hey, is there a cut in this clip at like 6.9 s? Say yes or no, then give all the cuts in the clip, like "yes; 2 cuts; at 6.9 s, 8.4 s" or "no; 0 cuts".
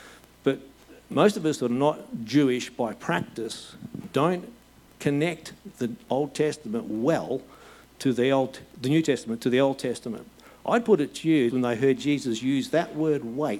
no; 1 cut; at 11.5 s